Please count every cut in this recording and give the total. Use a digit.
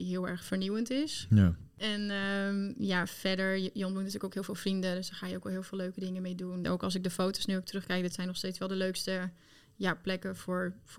1